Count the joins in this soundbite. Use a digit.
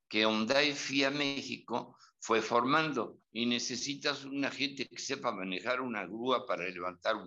1